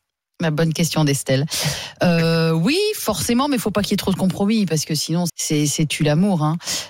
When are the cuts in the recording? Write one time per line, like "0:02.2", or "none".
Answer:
0:05.3